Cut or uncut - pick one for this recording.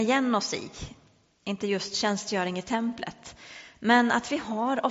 uncut